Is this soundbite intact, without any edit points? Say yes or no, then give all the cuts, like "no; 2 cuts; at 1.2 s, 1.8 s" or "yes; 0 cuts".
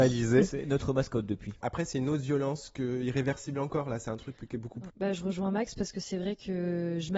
no; 2 cuts; at 1.6 s, 4.9 s